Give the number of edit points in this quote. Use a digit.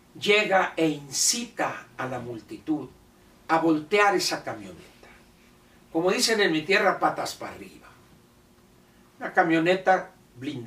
0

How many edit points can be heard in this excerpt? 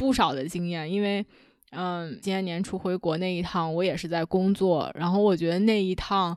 1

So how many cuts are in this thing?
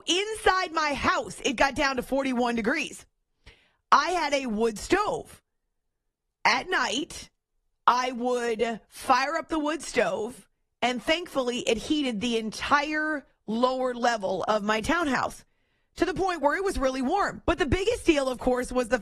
1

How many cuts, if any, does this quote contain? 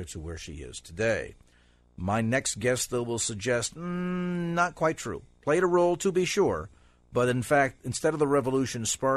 0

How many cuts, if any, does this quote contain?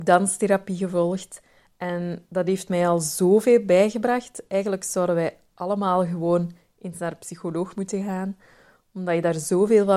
0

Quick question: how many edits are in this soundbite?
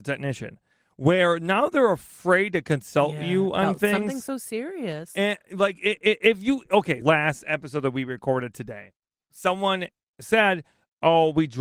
1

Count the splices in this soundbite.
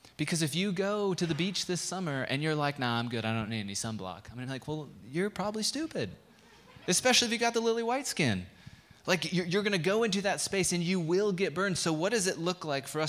0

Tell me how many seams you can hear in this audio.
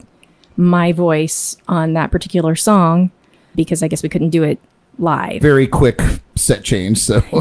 2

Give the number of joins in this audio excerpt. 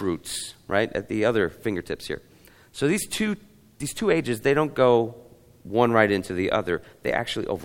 0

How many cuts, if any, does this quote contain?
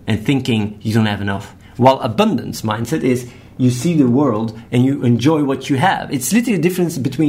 0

